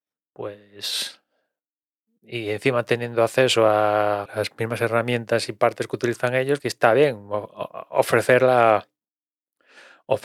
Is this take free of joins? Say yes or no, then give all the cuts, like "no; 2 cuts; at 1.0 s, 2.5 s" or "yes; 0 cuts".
no; 2 cuts; at 4.3 s, 6.6 s